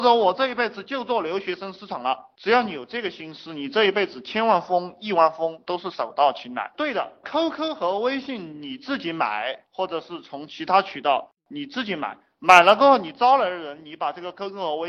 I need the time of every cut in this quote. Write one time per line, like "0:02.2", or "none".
0:06.7
0:09.6